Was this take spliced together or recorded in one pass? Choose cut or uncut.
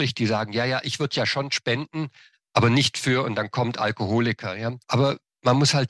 uncut